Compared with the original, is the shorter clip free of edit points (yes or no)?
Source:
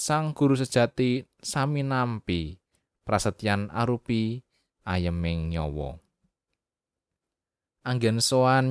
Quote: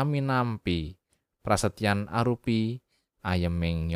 yes